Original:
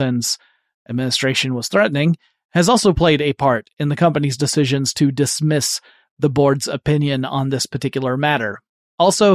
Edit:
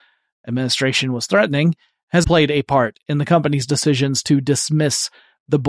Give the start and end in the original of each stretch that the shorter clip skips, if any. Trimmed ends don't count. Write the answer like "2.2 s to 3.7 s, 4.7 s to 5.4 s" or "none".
2.7 s to 2.9 s

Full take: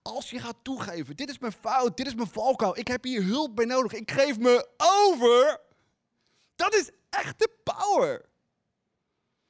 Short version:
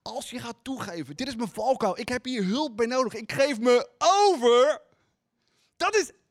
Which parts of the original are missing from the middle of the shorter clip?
1.2 s to 2.0 s

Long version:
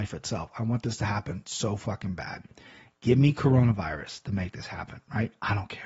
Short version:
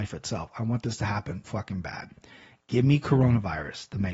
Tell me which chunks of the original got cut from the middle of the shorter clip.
1.4 s to 1.8 s

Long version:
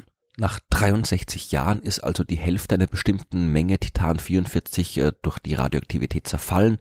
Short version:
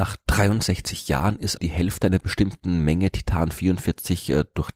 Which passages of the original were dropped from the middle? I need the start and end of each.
2.0 s to 2.2 s

